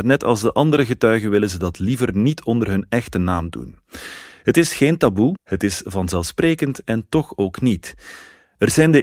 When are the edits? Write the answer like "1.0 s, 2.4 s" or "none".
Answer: 5.4 s